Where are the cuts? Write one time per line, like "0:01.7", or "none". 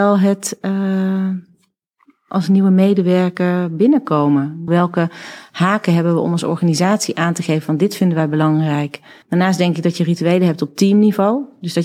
0:04.7
0:09.2